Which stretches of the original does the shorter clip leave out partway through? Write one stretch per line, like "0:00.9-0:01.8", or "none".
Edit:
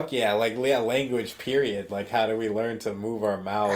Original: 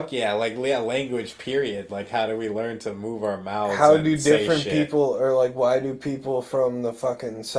none